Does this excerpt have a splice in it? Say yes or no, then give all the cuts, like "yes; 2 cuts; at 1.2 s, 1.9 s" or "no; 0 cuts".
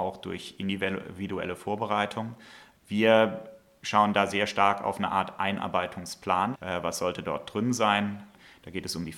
yes; 1 cut; at 6.5 s